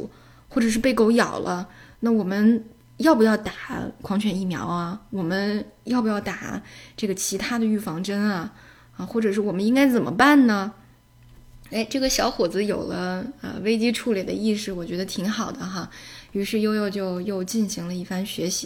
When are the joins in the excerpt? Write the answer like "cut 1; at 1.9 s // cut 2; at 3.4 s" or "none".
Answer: none